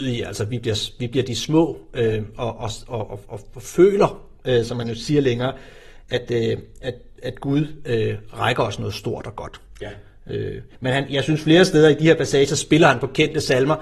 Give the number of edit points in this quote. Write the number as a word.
zero